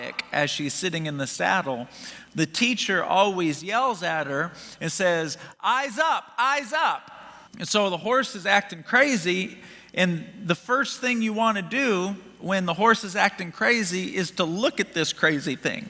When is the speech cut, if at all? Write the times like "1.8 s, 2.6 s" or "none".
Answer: 7.5 s